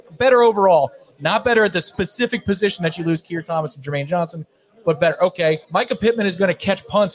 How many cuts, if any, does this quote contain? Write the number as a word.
one